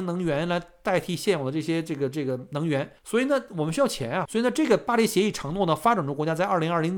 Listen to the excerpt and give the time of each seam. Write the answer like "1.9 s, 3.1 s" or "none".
3.0 s, 4.3 s